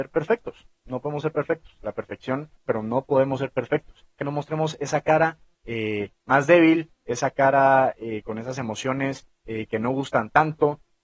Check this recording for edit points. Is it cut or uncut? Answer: cut